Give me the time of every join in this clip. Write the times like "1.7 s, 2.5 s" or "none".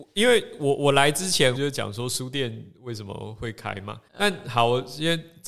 1.6 s, 4.1 s